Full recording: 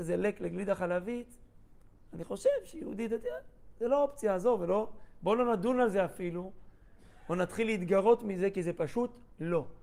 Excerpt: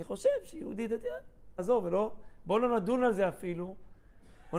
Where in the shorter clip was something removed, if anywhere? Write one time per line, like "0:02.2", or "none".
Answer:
0:01.6